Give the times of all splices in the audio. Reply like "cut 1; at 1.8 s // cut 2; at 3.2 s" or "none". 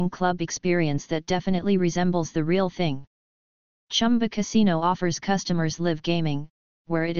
none